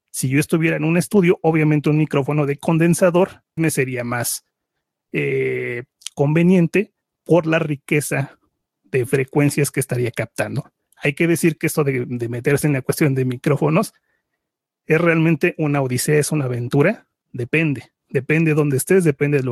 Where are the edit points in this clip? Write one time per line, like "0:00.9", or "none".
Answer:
0:03.6
0:17.2